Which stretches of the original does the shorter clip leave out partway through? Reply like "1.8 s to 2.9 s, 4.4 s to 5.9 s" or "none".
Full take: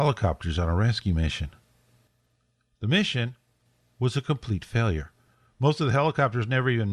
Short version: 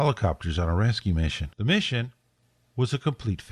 1.5 s to 2.8 s

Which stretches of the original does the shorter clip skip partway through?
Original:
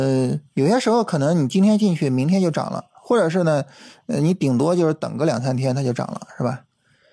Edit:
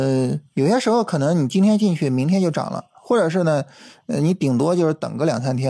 none

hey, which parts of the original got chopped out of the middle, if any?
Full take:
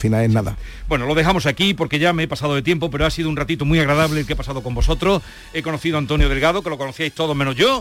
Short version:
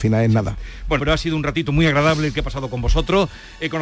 1.0 s to 2.9 s

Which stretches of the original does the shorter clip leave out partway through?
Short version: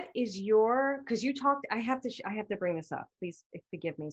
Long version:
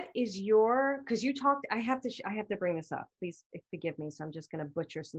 none

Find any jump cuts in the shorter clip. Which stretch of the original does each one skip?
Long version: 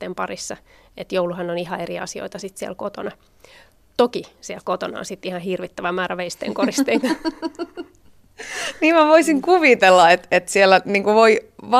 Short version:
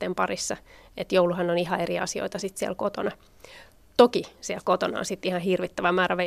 none

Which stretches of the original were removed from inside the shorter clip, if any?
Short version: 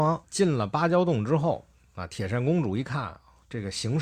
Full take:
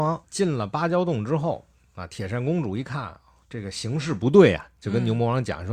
none

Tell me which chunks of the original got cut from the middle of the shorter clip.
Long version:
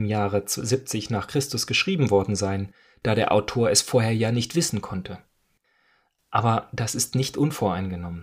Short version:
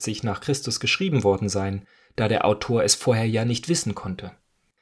none

